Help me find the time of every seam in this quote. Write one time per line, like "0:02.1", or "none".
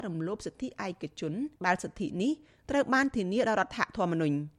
0:01.6